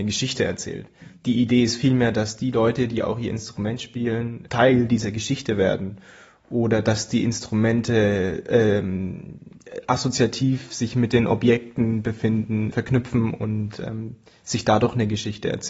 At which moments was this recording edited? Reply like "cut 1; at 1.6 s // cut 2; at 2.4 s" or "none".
cut 1; at 4.5 s // cut 2; at 12.7 s